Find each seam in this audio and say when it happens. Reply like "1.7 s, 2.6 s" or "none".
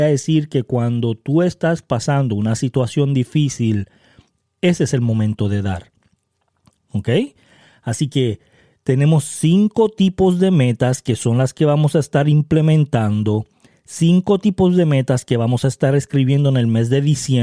6.8 s

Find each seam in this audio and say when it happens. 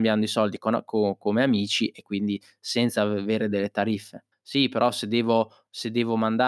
4.3 s

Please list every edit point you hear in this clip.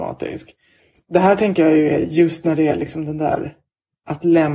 none

